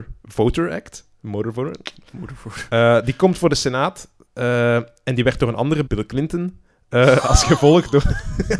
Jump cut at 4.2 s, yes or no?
no